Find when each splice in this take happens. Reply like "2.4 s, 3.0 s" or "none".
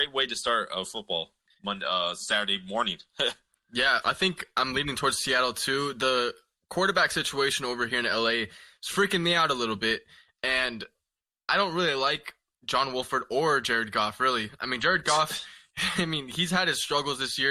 4.0 s